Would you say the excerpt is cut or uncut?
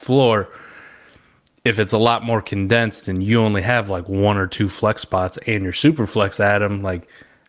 uncut